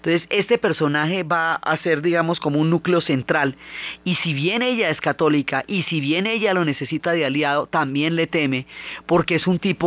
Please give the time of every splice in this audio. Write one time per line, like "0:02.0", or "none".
none